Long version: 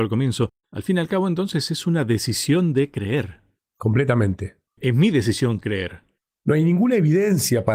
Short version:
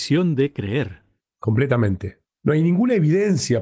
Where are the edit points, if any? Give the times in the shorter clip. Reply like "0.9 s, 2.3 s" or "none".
2.2 s